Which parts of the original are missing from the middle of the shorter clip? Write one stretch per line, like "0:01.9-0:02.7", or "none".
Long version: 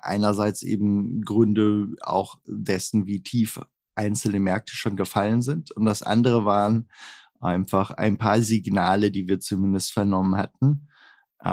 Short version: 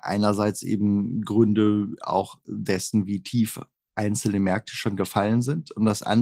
none